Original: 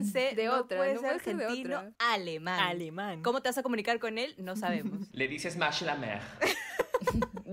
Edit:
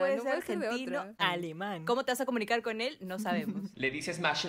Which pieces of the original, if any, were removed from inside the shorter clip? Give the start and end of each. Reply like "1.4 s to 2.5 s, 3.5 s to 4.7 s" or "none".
2.0 s to 2.6 s